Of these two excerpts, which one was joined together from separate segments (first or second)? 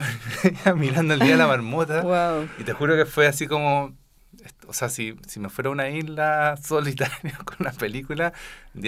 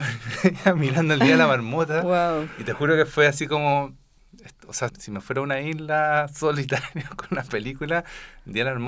second